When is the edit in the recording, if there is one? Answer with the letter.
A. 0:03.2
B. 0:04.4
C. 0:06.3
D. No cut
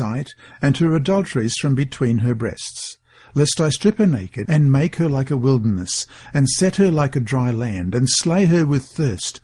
B